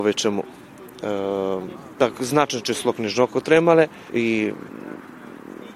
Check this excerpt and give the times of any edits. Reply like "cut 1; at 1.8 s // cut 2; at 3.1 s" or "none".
cut 1; at 1.9 s // cut 2; at 4.1 s

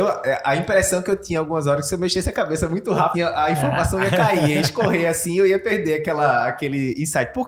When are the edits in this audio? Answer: cut 1; at 3.1 s

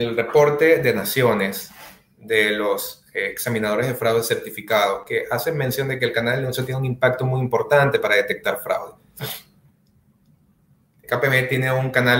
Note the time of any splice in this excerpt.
cut 1; at 11.0 s

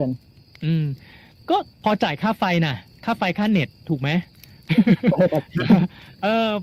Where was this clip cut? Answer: cut 1; at 1.7 s

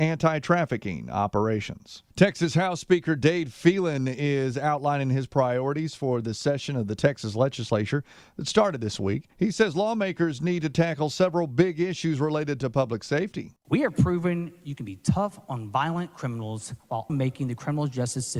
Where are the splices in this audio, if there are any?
cut 1; at 2.1 s // cut 2; at 9.3 s // cut 3; at 17.1 s

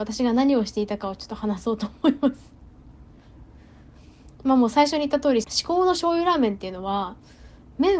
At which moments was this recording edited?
cut 1; at 5.4 s

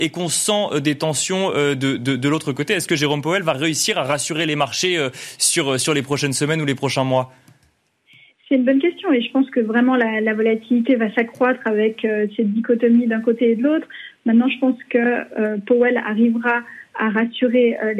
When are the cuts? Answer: none

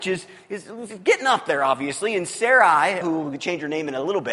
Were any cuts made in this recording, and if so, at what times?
cut 1; at 3.0 s

